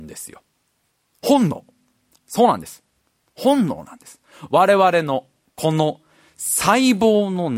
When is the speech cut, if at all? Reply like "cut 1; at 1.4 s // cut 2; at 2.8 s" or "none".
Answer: none